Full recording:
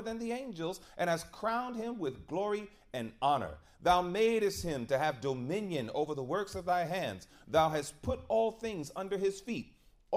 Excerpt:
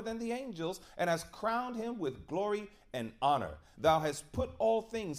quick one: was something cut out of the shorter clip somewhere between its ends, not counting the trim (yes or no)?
yes